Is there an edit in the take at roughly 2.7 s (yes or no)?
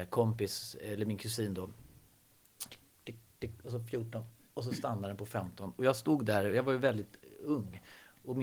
yes